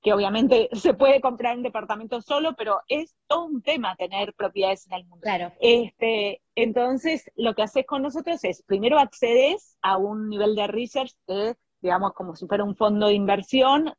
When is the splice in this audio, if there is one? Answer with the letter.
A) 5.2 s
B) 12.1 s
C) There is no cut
A